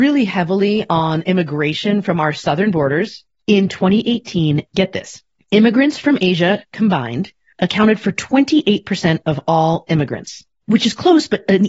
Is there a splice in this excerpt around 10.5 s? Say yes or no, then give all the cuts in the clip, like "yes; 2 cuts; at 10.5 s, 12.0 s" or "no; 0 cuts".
no; 1 cut; at 4.7 s